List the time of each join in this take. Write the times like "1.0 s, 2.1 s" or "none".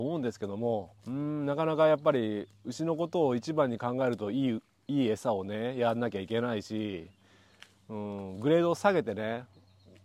1.0 s

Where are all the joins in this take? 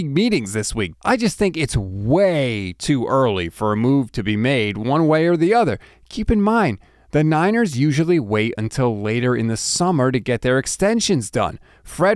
0.9 s

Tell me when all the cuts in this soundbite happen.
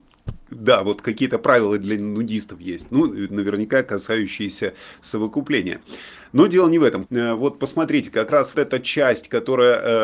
7.1 s, 8.5 s

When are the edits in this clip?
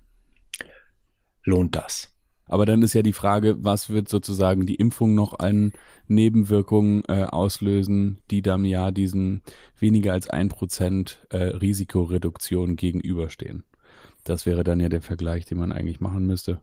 2.5 s

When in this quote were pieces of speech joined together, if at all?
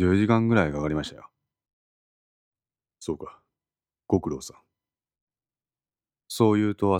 none

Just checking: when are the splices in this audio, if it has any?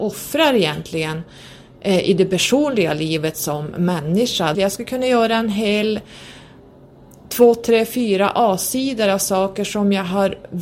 4.5 s

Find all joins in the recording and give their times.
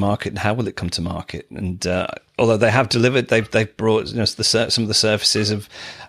none

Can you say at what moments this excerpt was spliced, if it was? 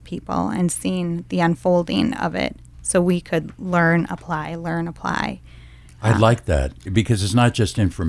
none

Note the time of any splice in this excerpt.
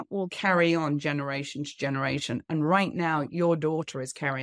none

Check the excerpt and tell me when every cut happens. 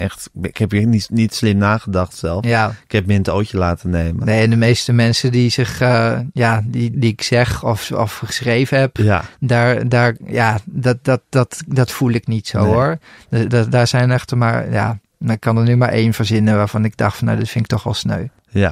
6.9 s

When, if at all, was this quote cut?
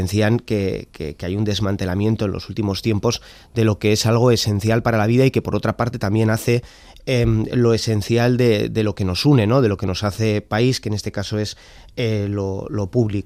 none

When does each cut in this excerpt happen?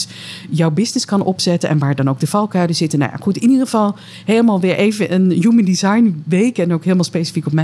none

